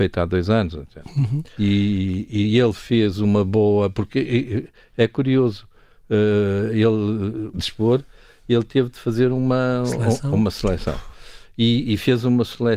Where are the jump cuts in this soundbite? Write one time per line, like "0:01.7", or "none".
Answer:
0:01.6
0:07.5